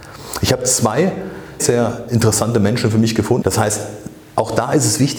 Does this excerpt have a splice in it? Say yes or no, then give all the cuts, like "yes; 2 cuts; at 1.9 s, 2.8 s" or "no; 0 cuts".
yes; 2 cuts; at 1.6 s, 3.4 s